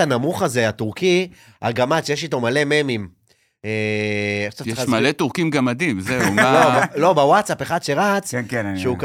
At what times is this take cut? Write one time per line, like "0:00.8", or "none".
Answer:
none